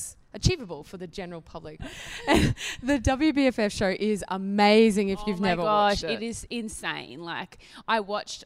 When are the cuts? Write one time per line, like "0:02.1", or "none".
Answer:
0:01.8